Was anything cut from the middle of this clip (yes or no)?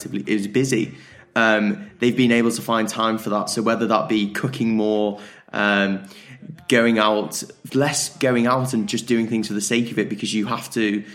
yes